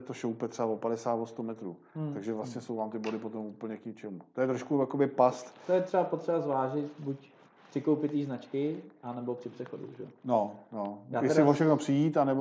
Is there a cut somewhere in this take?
no; 0 cuts

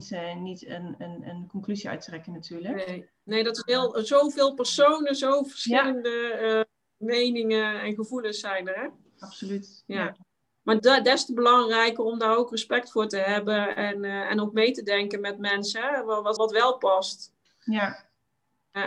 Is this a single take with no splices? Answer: no; 2 cuts; at 10.8 s, 16.4 s

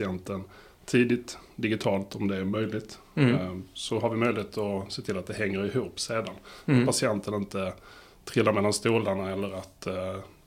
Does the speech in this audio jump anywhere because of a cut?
no; 0 cuts

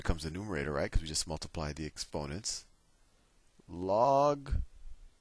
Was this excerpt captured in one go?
yes; 0 cuts

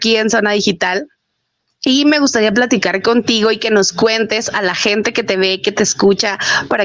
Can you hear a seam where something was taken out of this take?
no; 0 cuts

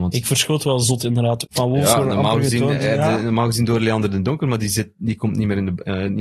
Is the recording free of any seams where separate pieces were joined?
no; 1 cut; at 1.4 s

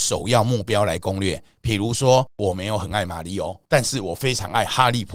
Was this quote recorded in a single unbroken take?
no; 2 cuts; at 2.3 s, 3.7 s

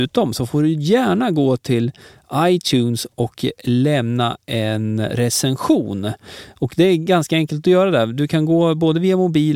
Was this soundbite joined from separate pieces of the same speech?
no; 0 cuts

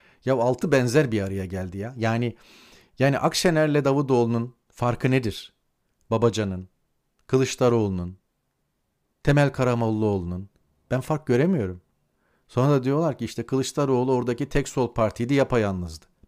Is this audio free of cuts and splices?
yes; 0 cuts

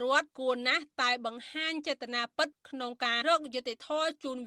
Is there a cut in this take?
yes; 1 cut; at 3.2 s

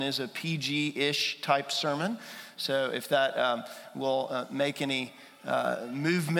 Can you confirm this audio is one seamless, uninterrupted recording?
yes; 0 cuts

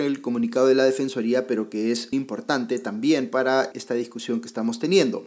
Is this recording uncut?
no; 2 cuts; at 2.1 s, 3.7 s

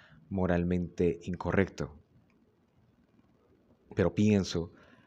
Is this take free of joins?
yes; 0 cuts

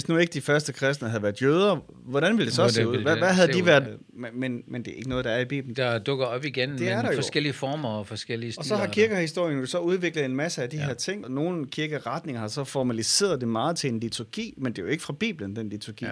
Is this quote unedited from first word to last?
no; 3 cuts; at 3.9 s, 5.7 s, 11.2 s

